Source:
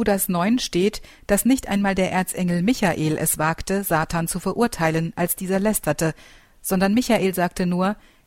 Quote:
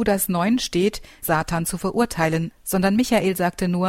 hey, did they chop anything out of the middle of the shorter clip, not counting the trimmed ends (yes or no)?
yes